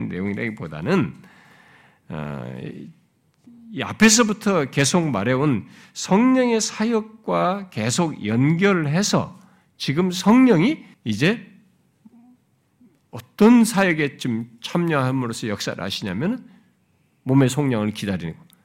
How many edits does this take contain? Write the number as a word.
one